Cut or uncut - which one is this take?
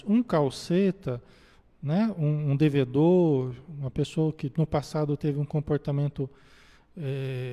uncut